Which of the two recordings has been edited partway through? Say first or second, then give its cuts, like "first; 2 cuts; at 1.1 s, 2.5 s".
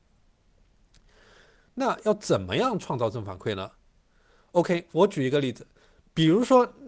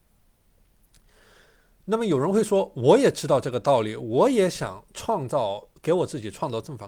first; 1 cut; at 1.7 s